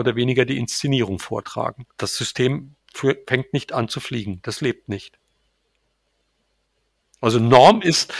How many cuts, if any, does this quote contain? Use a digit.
1